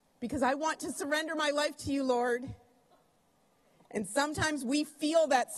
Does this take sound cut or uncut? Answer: uncut